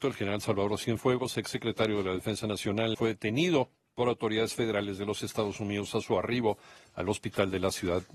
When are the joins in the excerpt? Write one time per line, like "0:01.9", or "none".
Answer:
0:02.9